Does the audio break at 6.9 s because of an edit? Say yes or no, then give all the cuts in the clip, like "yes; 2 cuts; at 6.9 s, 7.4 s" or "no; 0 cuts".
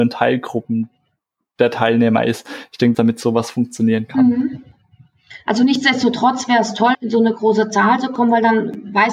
yes; 2 cuts; at 2.9 s, 6.9 s